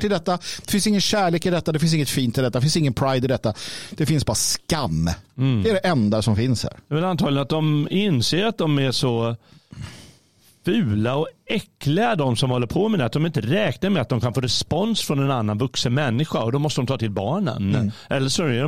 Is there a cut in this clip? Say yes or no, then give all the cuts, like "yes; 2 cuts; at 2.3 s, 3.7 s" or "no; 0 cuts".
no; 0 cuts